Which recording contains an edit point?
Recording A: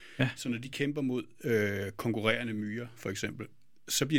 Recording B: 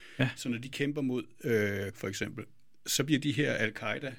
B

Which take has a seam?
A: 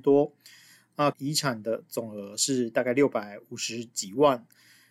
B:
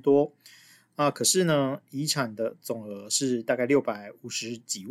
A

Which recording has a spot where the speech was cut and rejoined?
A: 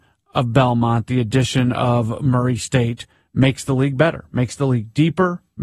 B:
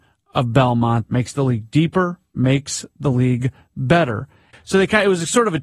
B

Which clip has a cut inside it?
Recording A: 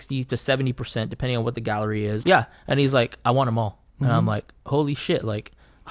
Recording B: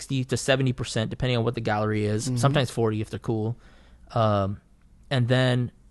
A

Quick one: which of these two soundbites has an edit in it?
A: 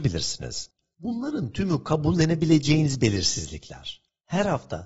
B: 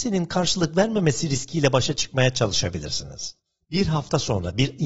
A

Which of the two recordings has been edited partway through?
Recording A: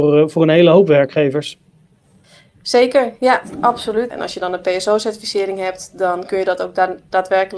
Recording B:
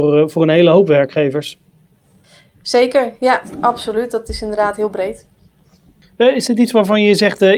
A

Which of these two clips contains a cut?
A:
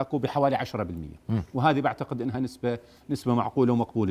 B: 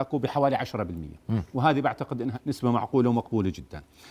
B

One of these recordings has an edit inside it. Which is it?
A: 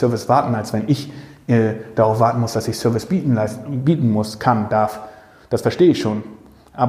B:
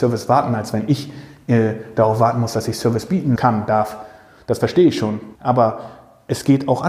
B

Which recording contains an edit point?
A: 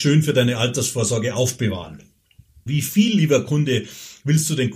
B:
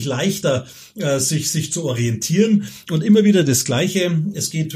A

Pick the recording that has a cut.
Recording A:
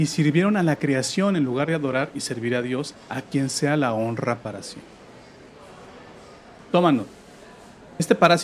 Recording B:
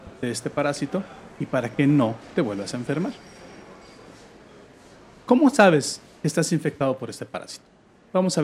A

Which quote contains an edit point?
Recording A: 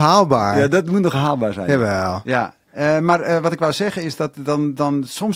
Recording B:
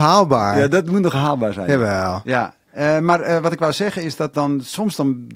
B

